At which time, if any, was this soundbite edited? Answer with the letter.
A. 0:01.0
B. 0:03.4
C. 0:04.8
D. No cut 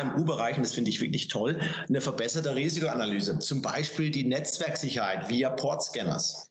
D